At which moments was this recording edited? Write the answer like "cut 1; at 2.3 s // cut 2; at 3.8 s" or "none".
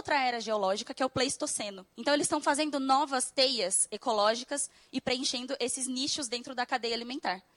none